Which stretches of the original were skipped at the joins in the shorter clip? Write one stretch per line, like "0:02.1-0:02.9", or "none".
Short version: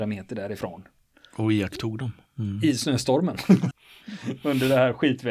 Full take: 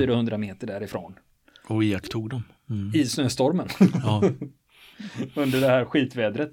0:04.0-0:04.6